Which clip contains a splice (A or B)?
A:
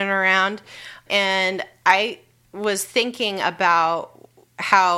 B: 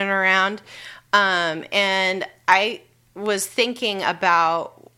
A